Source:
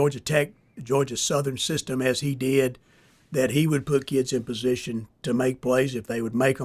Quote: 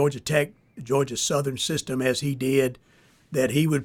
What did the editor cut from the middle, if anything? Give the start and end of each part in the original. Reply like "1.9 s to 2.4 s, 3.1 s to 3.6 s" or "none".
none